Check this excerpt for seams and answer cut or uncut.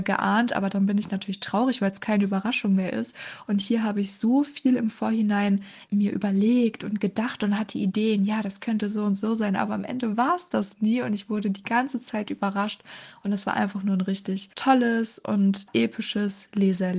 uncut